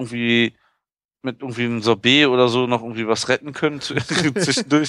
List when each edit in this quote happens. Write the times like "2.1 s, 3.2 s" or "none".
none